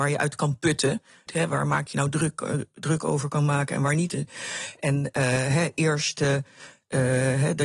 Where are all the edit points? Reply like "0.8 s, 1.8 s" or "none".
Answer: 1.3 s